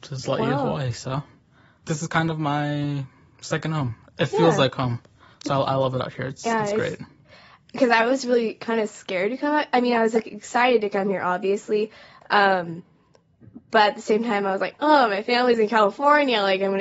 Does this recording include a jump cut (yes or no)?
no